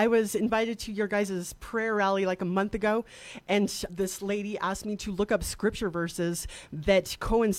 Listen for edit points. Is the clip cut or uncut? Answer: cut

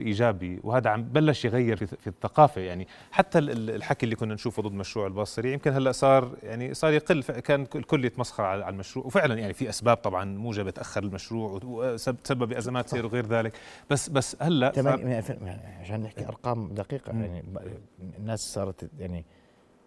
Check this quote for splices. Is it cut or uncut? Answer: cut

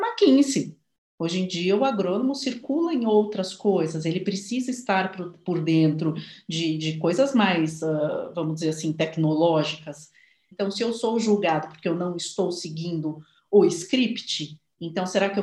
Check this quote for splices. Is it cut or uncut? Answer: cut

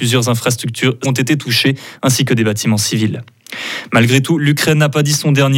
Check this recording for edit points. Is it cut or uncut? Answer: cut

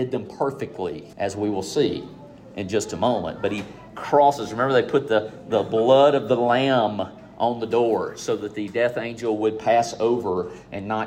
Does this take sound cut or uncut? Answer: cut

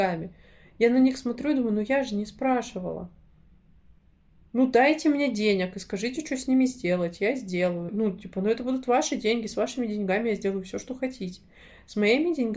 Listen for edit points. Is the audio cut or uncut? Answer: cut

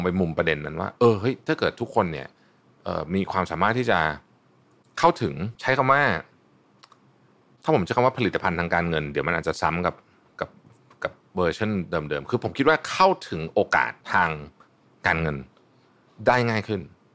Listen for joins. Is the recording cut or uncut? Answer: cut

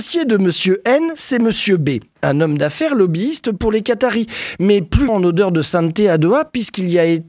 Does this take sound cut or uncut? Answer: cut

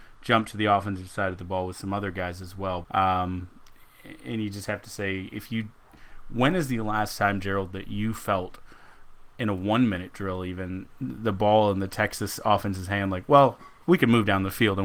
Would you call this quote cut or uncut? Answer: cut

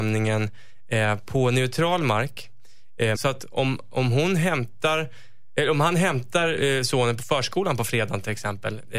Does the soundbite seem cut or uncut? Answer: cut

